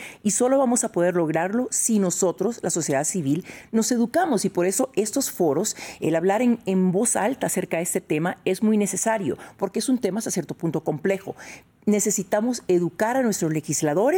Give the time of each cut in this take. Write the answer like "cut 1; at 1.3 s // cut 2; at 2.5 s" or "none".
none